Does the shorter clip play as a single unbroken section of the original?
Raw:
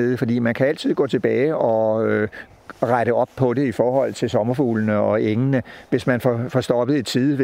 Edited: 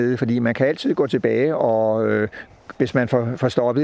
no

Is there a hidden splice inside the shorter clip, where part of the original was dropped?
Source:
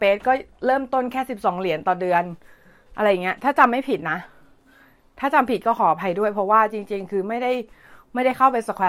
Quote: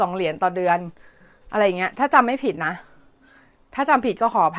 no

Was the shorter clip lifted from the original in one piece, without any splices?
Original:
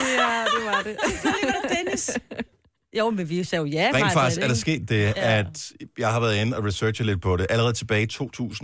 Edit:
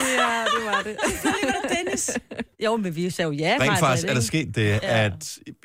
no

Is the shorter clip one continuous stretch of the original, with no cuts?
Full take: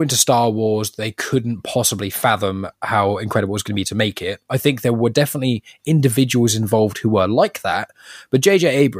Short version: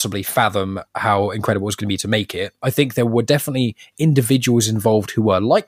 yes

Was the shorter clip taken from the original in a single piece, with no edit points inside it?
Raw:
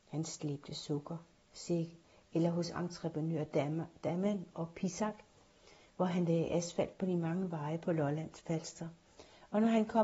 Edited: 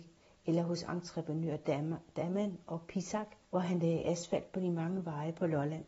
no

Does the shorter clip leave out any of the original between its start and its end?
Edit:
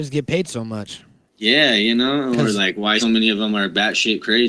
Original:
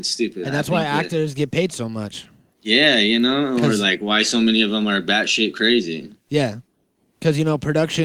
yes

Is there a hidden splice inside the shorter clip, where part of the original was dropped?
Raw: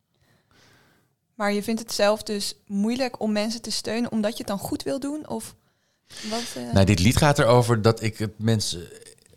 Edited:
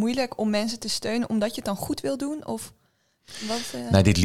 no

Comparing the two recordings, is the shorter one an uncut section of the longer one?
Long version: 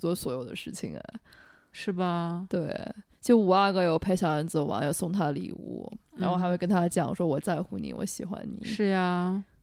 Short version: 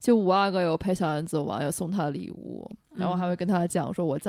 yes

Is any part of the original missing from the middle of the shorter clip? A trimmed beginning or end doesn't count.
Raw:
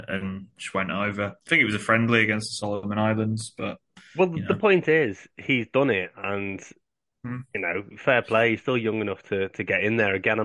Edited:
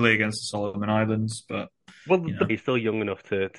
yes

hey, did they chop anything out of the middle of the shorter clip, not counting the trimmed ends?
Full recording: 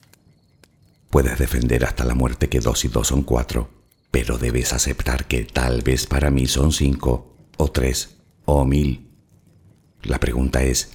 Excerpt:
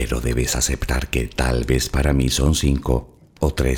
no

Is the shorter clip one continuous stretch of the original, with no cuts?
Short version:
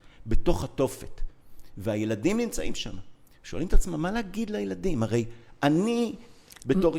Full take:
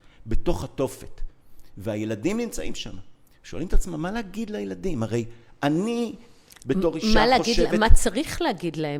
yes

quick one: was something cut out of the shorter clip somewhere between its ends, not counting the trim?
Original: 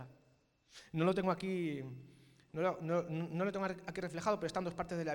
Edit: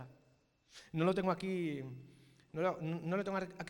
yes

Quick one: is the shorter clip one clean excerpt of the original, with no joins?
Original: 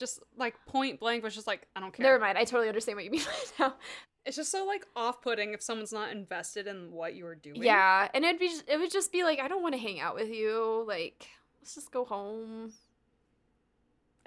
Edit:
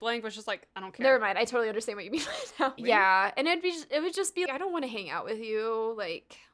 no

